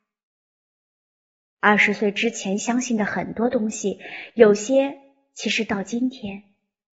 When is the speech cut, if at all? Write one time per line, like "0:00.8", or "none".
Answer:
none